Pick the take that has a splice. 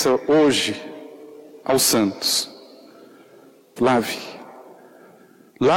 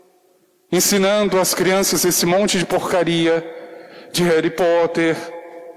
first; 1 cut; at 3.8 s

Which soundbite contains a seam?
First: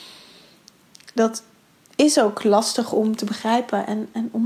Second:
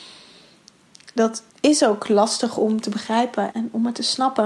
second; 2 cuts; at 1.5 s, 3.5 s

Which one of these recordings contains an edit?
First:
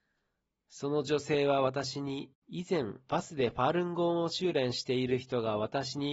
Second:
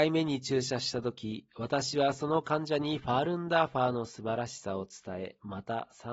first; 1 cut; at 2.4 s

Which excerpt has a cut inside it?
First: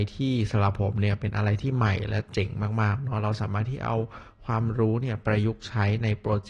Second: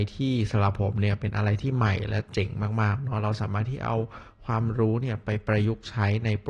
first; 1 cut; at 5.2 s

